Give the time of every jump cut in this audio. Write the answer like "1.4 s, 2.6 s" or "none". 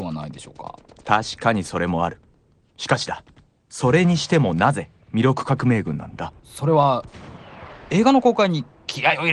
6.4 s